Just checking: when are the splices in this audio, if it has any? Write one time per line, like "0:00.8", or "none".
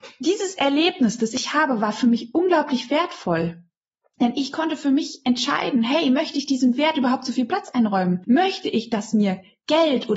none